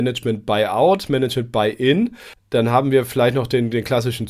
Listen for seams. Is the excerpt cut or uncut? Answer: uncut